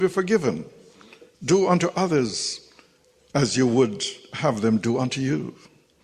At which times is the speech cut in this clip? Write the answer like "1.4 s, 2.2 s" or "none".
1.3 s